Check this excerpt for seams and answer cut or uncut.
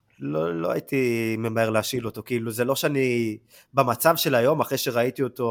uncut